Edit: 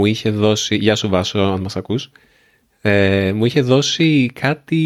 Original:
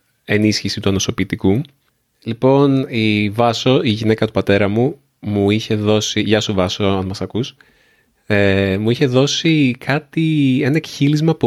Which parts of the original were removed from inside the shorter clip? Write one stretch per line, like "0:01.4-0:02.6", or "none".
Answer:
none

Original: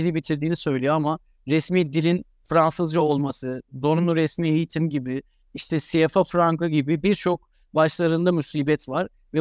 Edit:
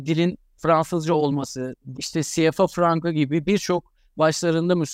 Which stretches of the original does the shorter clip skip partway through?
0:03.8-0:05.5

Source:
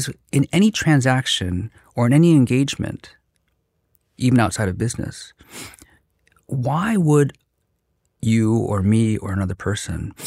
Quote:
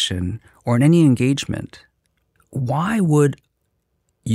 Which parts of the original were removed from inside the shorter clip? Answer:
0:03.7-0:06.3

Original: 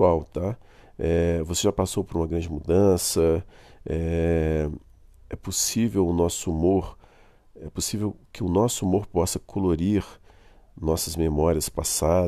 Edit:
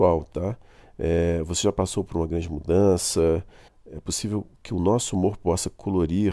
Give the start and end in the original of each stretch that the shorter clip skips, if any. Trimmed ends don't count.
0:03.7-0:07.4

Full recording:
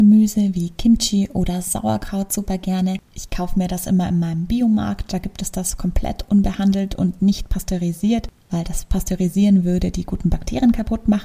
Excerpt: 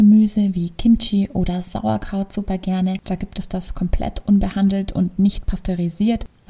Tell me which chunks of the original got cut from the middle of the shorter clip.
0:03.0-0:05.1

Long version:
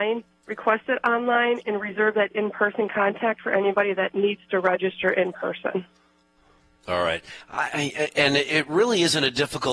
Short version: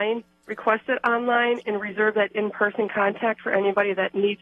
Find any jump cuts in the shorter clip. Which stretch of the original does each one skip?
none

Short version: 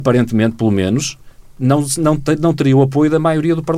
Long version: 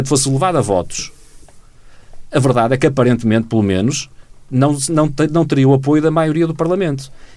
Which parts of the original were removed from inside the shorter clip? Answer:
none

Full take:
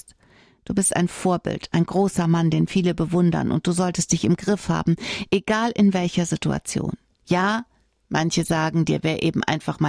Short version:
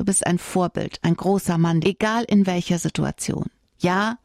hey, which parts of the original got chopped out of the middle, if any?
0:02.5-0:05.3

